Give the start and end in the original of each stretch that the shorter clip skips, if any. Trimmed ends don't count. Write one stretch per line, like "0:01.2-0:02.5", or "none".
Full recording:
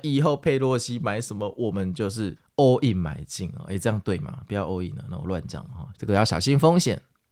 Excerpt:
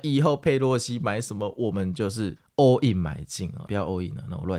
0:03.7-0:04.5